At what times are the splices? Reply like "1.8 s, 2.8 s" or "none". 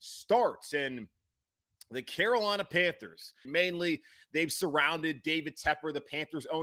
3.5 s